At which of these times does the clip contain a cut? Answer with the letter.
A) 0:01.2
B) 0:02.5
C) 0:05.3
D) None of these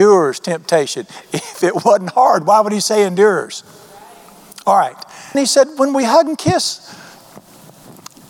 C